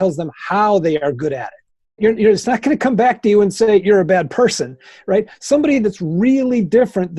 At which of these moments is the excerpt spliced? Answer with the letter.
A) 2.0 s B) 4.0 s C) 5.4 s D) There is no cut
A